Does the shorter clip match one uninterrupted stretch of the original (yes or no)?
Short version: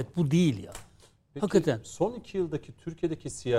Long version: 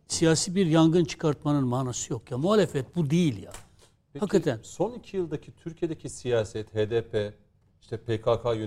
yes